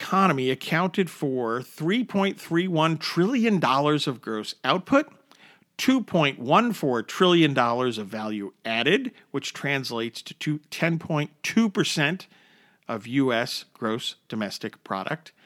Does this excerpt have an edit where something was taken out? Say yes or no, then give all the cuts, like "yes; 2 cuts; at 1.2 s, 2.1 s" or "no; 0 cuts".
no; 0 cuts